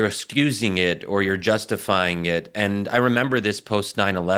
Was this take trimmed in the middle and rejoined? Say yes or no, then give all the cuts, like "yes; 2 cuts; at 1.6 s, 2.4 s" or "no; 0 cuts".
no; 0 cuts